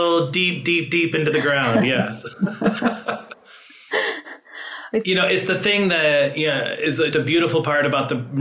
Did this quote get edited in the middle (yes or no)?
yes